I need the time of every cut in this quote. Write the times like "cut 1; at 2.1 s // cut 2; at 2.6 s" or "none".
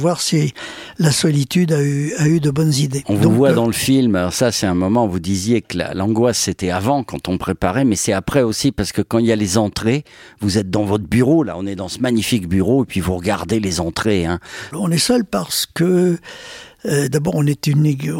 cut 1; at 14.7 s